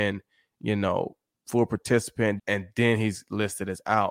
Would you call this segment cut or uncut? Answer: cut